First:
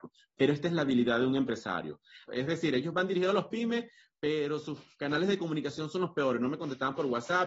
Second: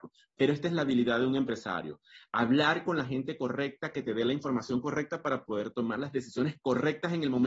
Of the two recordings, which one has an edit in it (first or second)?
first